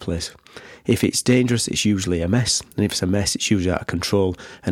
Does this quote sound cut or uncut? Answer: uncut